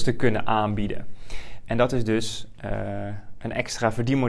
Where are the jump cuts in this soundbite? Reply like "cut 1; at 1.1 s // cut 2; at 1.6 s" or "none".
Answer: none